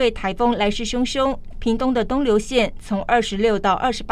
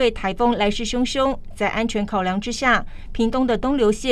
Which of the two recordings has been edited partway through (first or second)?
first